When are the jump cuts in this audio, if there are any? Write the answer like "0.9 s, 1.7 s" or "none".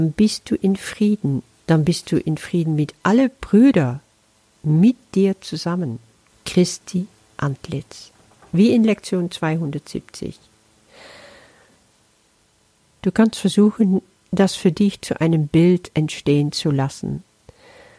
6.3 s